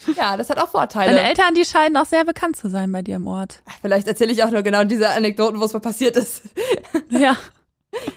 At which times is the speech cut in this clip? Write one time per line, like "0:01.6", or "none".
none